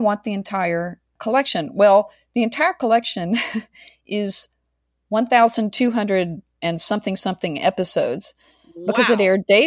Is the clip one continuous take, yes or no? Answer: yes